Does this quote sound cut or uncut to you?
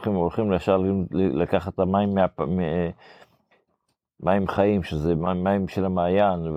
uncut